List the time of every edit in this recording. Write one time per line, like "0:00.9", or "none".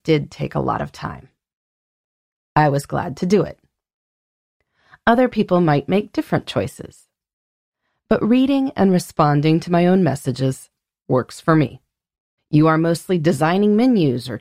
0:12.4